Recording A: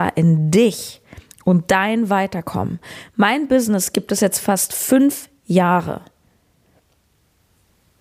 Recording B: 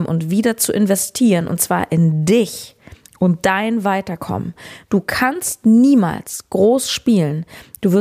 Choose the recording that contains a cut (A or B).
B